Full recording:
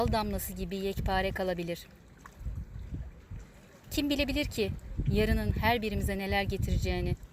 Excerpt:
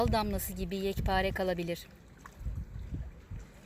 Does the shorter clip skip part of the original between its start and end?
no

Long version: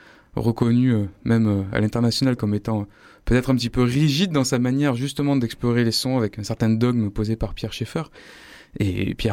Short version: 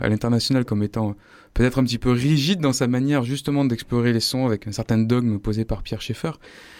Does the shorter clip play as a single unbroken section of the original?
yes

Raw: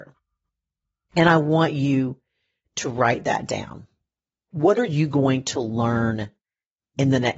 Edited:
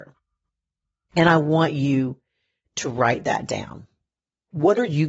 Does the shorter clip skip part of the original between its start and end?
no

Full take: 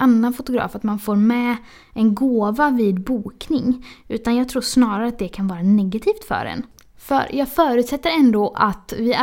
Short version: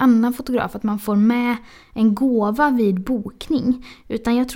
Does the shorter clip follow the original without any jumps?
yes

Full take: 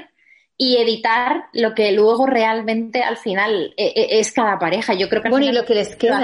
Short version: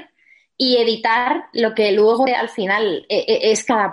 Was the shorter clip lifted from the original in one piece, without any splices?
no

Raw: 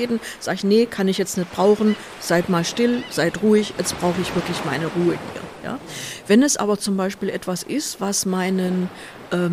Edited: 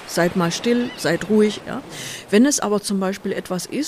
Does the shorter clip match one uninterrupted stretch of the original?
no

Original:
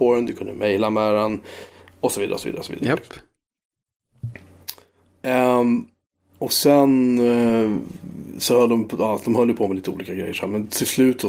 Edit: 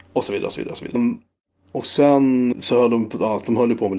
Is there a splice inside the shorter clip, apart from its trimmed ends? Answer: yes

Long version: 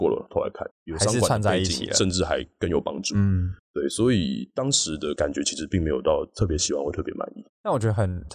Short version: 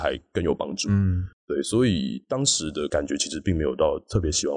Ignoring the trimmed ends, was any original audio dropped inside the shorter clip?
no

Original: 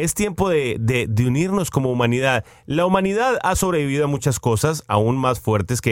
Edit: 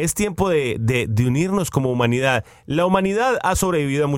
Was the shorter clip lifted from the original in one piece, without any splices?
yes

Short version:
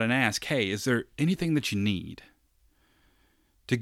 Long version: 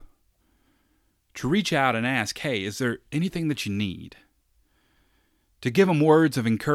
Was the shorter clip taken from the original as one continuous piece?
yes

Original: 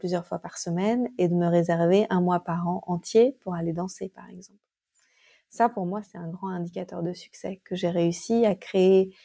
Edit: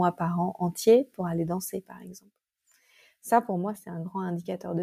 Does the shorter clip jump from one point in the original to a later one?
no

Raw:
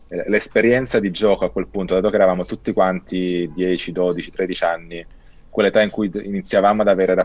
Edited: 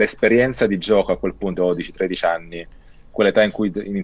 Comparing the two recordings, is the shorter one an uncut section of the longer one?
no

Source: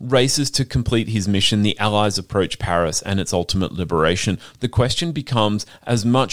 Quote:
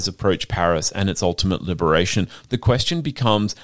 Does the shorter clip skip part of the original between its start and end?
no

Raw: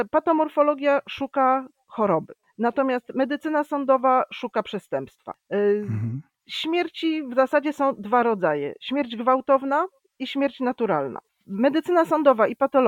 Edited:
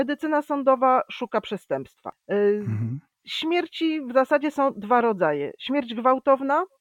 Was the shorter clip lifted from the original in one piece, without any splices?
yes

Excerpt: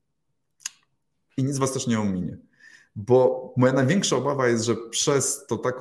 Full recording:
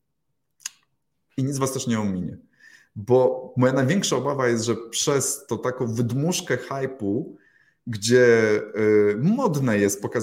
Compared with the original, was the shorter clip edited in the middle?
no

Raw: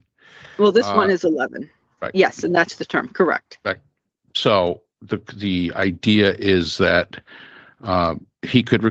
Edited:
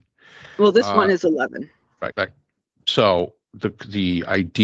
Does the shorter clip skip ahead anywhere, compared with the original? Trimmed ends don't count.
yes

